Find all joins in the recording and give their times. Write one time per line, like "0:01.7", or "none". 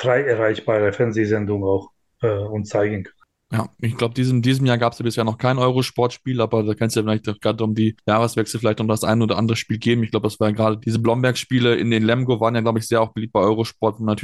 0:10.8